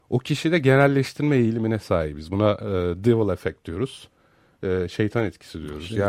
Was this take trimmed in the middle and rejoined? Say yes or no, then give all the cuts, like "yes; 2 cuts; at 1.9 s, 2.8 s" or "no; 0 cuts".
no; 0 cuts